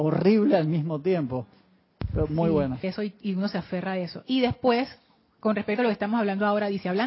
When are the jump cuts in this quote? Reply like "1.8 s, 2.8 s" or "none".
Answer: 2.8 s